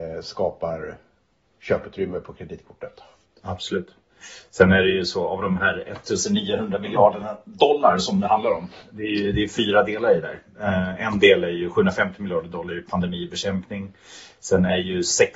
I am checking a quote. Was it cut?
no; 0 cuts

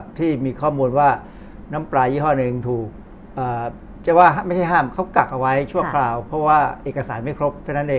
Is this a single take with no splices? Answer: yes; 0 cuts

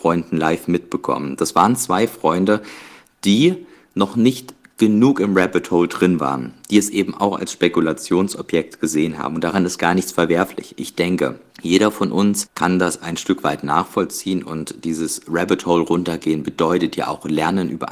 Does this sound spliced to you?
no; 0 cuts

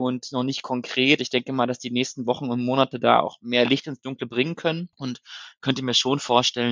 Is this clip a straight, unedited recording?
yes; 0 cuts

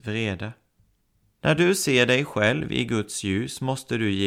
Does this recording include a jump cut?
yes; 1 cut; at 1.4 s

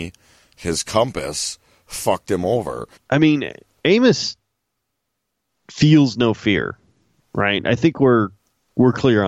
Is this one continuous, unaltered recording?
no; 1 cut; at 2.9 s

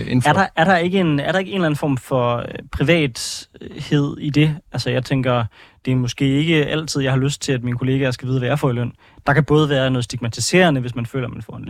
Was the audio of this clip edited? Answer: no; 0 cuts

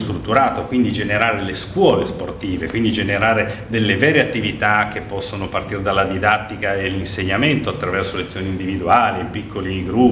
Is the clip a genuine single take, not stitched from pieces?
yes; 0 cuts

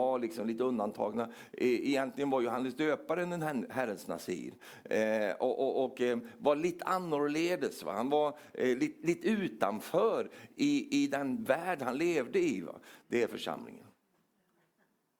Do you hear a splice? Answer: no; 0 cuts

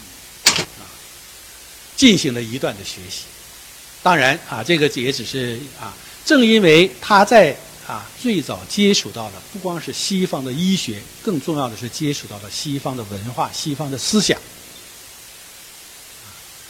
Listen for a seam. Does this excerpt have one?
yes; 1 cut; at 8.2 s

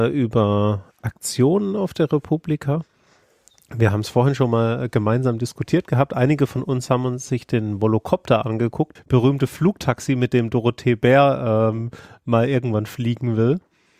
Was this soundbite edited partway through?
yes; 1 cut; at 9.0 s

